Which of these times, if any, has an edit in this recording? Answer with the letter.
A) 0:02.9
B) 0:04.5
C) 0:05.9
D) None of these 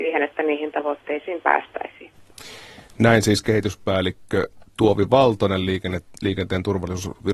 D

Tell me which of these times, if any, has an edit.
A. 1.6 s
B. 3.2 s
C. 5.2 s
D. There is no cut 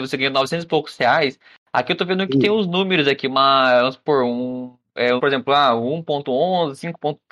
C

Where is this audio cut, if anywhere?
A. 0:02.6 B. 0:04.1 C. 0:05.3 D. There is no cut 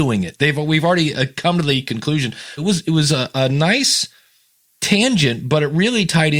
A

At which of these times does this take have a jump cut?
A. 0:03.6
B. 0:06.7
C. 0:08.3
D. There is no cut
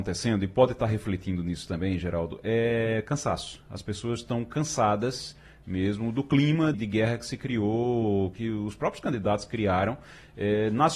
B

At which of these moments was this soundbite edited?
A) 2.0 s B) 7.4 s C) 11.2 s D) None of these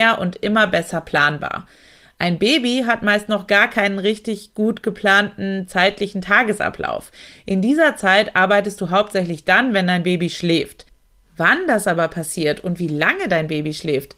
D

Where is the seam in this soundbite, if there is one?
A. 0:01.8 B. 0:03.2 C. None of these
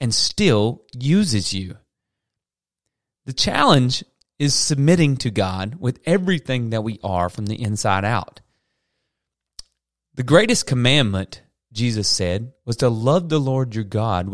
C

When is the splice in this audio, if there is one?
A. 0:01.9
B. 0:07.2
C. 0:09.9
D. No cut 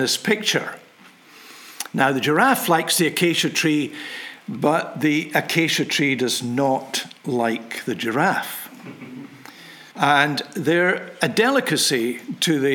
C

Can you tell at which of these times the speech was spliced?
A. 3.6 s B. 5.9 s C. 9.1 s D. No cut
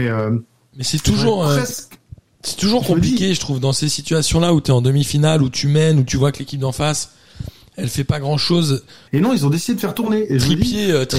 C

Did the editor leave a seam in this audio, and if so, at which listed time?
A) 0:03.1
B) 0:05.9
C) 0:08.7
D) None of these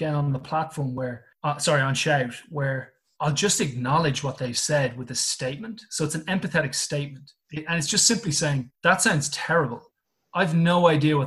C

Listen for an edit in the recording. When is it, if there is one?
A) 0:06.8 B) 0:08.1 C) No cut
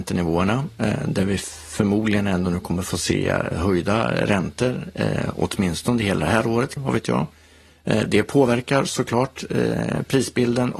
A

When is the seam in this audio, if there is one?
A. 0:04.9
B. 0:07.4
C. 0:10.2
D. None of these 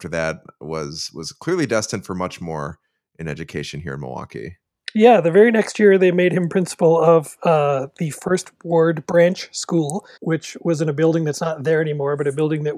C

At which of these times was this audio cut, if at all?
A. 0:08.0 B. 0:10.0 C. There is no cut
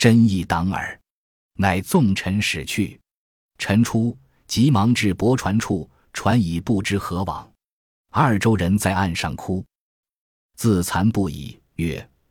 B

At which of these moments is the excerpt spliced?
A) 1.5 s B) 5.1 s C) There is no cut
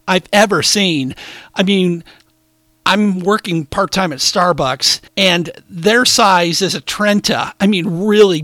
B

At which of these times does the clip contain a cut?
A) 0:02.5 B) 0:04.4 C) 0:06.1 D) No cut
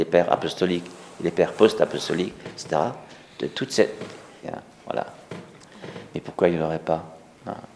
B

